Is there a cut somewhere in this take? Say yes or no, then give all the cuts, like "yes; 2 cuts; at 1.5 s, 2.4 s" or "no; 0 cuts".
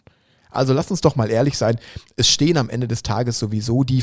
no; 0 cuts